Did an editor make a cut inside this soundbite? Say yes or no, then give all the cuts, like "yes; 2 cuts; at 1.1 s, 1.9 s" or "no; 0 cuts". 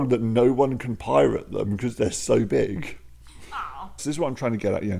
yes; 1 cut; at 4.0 s